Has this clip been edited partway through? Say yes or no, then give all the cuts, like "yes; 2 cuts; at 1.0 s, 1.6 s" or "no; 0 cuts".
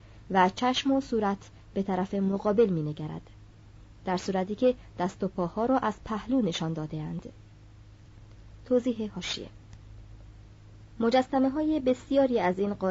no; 0 cuts